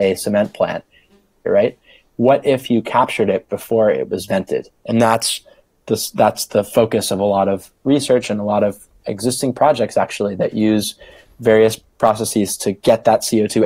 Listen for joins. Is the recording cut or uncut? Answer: cut